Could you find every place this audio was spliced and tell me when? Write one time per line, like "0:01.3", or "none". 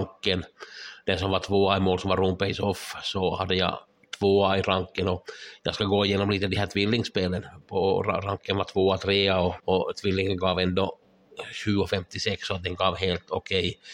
0:09.6